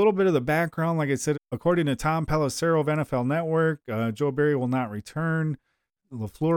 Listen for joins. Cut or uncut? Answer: cut